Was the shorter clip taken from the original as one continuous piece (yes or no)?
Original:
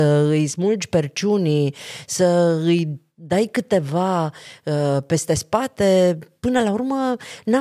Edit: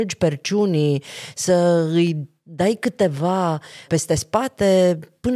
no